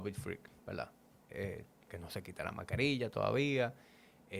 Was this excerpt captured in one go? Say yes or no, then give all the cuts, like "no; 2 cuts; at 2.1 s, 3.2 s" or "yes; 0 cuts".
no; 1 cut; at 1.9 s